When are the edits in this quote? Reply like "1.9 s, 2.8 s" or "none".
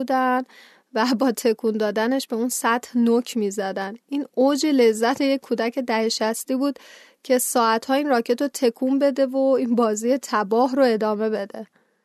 none